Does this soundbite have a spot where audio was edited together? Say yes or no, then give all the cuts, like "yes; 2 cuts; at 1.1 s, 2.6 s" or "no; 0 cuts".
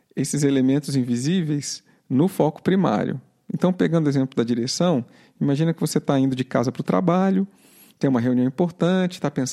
no; 0 cuts